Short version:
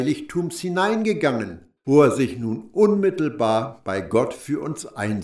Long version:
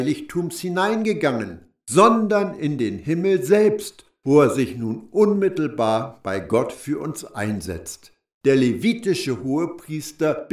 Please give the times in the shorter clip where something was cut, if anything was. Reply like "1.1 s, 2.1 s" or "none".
1.8 s

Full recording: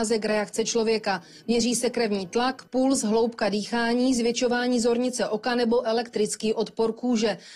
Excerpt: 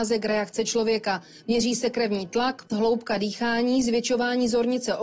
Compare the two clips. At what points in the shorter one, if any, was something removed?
2.7 s

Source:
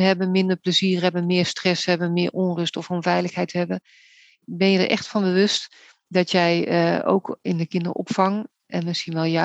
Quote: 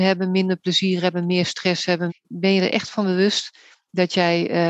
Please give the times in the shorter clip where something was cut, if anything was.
2.1 s

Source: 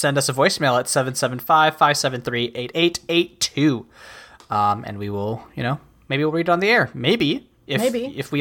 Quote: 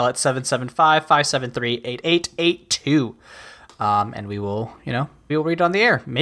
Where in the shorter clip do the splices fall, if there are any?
5.3 s

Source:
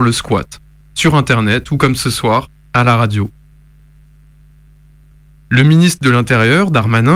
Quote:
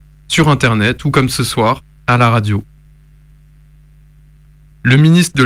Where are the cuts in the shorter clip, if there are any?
none

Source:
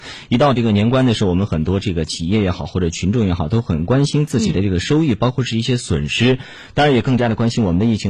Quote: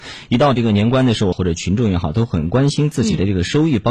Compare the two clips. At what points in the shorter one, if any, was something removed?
1.3 s

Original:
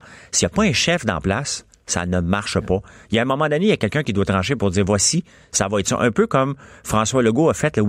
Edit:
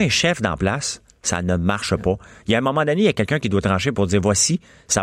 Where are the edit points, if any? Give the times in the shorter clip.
none

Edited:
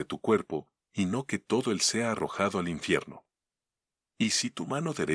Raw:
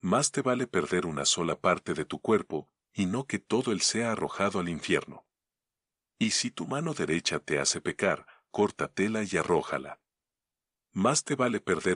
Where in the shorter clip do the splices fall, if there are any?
none

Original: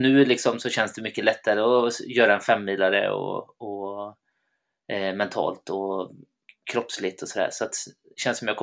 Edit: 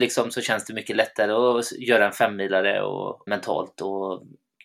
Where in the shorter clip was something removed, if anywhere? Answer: 3.3 s

